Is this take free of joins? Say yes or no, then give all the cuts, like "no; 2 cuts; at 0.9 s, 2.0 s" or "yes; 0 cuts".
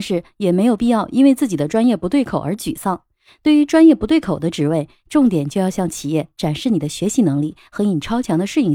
yes; 0 cuts